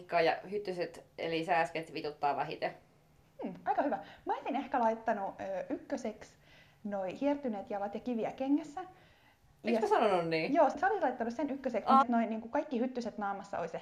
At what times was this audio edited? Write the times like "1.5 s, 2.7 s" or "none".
10.7 s, 12.0 s